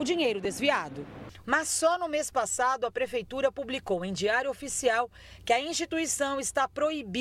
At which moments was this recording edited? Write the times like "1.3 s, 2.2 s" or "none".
1.4 s